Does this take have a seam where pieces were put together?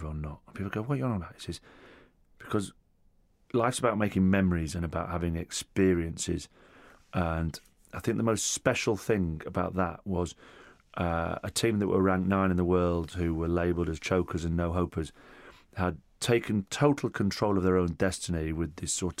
yes; 1 cut; at 4.7 s

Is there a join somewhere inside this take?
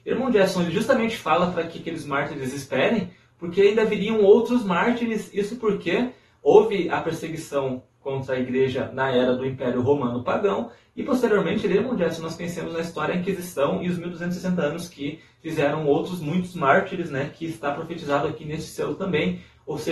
no; 0 cuts

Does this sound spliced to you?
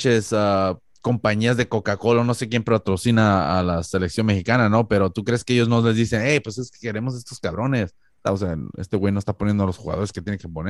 yes; 1 cut; at 8.2 s

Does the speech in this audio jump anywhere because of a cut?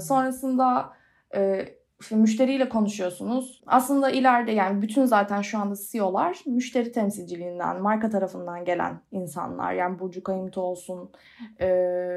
yes; 1 cut; at 3.6 s

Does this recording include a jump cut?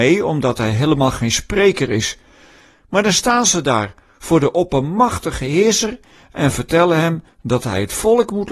no; 0 cuts

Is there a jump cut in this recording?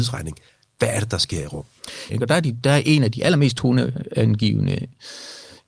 yes; 1 cut; at 2.1 s

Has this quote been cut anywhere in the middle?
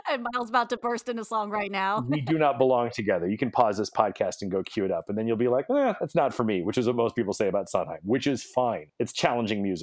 no; 0 cuts

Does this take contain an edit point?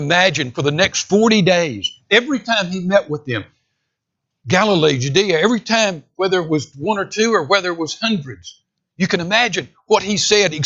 no; 0 cuts

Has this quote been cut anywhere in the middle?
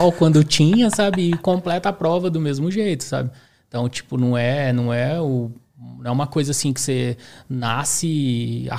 no; 0 cuts

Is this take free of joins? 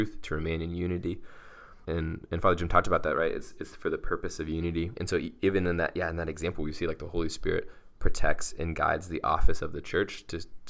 no; 2 cuts; at 1.8 s, 4.9 s

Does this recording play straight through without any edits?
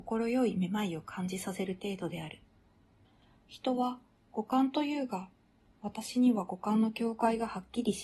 yes; 0 cuts

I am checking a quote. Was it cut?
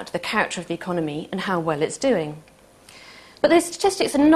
no; 0 cuts

